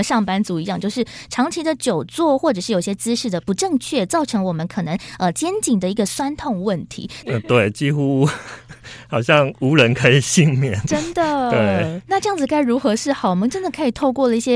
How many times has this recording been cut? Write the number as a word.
one